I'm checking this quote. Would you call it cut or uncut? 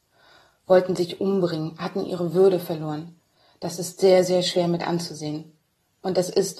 uncut